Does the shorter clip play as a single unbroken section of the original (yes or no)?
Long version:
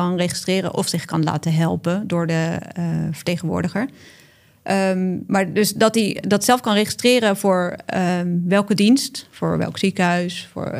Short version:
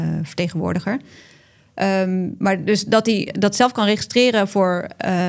yes